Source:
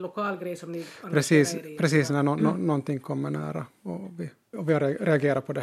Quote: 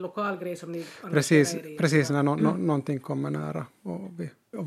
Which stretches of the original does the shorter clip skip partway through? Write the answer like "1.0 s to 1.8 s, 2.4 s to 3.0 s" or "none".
none